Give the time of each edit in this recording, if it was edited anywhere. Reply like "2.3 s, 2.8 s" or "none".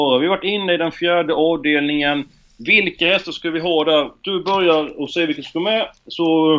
none